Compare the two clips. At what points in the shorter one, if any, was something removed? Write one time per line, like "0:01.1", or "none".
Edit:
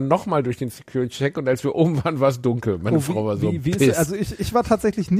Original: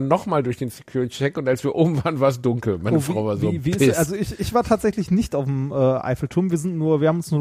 none